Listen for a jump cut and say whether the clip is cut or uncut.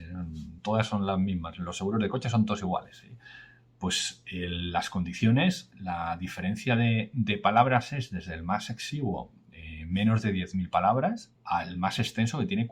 cut